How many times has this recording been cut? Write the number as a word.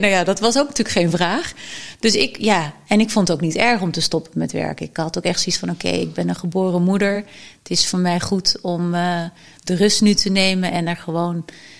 zero